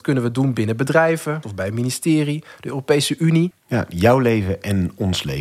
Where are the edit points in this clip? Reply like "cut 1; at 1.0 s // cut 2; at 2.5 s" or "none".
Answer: cut 1; at 1.4 s // cut 2; at 3.5 s